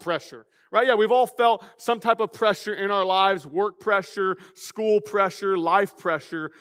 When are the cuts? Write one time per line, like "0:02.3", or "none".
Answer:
none